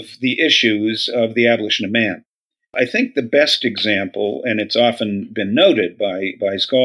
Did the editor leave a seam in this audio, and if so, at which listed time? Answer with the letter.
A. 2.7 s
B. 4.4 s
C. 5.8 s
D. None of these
A